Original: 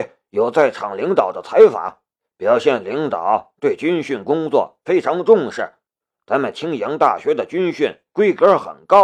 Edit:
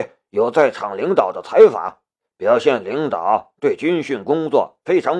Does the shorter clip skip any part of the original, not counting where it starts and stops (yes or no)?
no